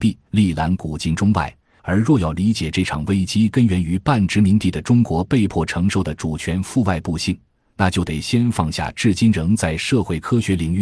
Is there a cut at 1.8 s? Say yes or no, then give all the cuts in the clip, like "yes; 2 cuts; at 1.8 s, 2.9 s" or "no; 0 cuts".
yes; 1 cut; at 1.8 s